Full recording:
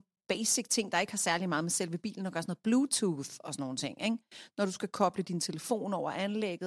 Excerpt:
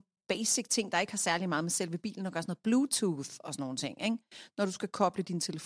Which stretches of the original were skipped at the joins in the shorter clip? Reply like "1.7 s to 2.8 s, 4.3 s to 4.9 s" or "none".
none